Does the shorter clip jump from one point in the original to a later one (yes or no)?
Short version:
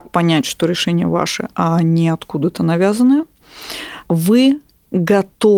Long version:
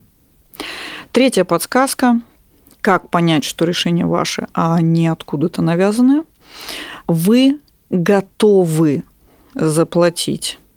no